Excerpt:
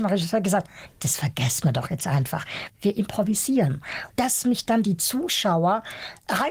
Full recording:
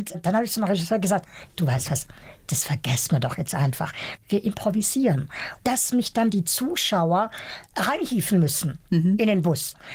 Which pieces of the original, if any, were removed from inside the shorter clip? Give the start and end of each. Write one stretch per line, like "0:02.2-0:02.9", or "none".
0:01.5-0:02.4